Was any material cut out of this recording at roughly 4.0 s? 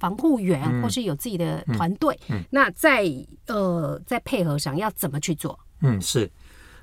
yes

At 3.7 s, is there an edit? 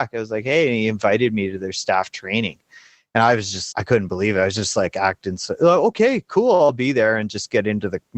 yes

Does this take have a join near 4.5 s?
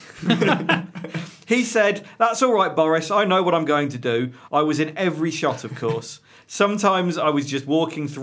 yes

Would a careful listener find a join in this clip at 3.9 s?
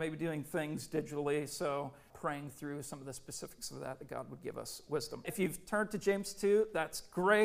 no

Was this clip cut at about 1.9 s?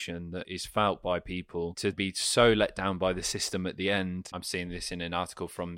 yes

